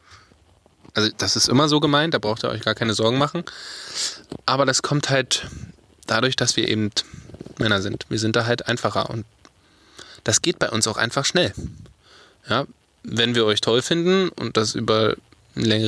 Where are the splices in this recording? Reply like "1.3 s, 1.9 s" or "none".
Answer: none